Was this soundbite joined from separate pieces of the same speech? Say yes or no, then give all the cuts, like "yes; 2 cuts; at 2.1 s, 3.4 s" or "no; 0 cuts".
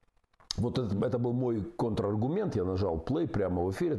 no; 0 cuts